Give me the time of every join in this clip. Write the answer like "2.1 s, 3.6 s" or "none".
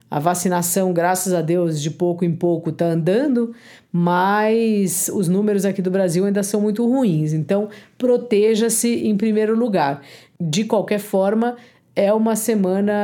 none

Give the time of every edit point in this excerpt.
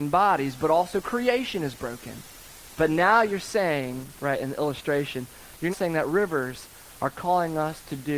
2.8 s, 4.2 s, 5.7 s

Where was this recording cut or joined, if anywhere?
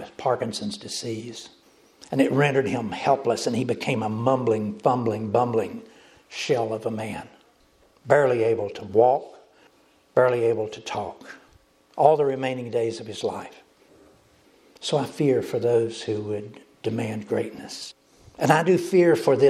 none

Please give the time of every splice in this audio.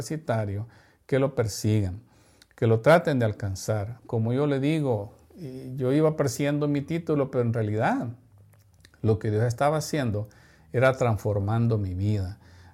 4.0 s

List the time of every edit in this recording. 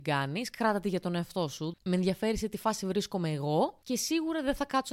1.7 s

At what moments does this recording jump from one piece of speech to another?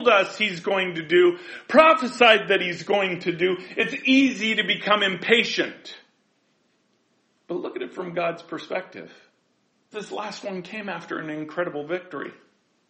9.9 s

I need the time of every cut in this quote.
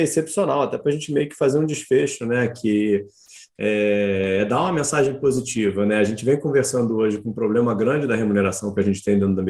none

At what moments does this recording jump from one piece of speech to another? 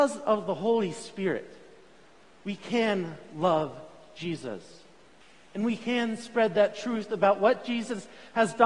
none

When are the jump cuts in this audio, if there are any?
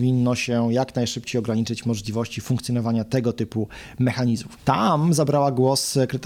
4.6 s

